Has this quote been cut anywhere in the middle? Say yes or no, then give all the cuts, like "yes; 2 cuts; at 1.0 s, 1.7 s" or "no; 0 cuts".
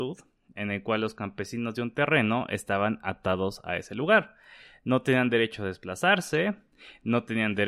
no; 0 cuts